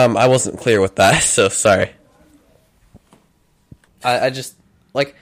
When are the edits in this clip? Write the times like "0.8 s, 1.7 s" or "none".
none